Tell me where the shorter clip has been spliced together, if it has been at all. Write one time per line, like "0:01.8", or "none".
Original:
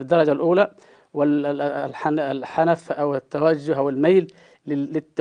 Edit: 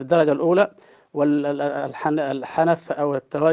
none